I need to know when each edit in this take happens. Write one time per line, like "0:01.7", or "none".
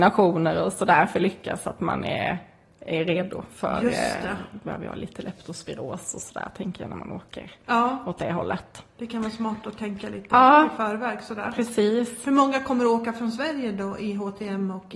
none

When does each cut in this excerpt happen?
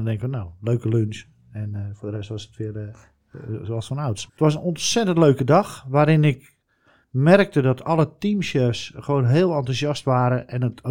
0:04.3

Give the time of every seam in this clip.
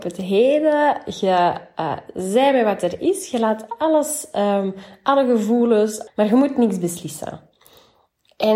0:06.1

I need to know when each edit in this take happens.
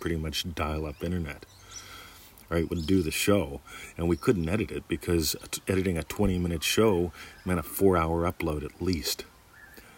none

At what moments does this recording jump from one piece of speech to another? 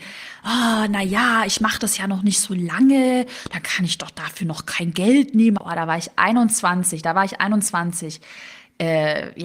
0:05.6

